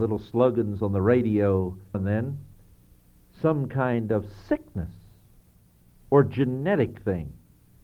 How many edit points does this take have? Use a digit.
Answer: 1